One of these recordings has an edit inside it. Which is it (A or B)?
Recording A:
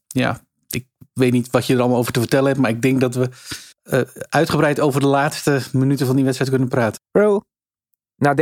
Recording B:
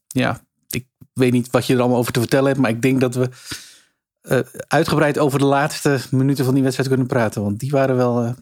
A